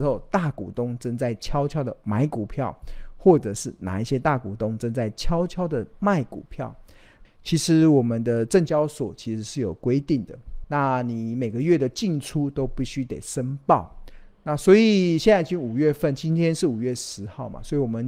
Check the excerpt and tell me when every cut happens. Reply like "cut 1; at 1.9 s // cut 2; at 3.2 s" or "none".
cut 1; at 7.2 s // cut 2; at 10.6 s